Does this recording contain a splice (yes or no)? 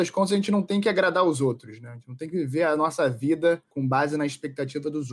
no